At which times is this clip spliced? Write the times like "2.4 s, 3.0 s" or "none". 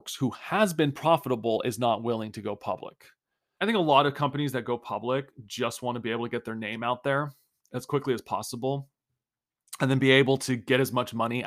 3.6 s